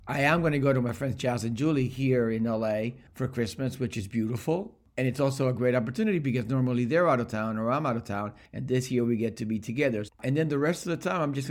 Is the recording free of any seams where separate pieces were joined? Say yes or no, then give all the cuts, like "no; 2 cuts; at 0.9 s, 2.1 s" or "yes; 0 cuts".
no; 1 cut; at 10.1 s